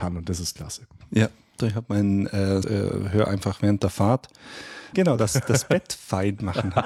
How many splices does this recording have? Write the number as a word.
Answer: three